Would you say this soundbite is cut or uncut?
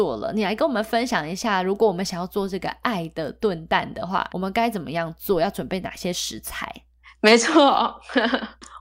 cut